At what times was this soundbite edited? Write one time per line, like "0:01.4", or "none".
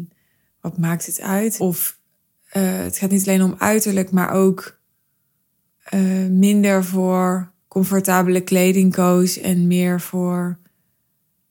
0:01.6
0:07.6